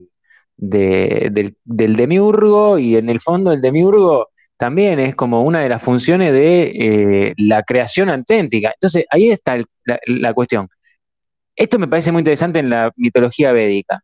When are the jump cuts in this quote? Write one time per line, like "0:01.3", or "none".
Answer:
0:09.8